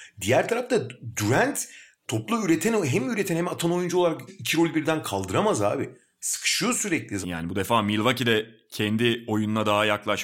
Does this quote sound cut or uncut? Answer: cut